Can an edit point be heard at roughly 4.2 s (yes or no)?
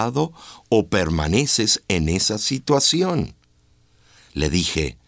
yes